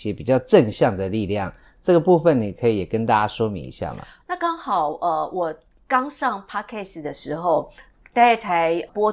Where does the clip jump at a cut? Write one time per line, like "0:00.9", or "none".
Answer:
0:04.2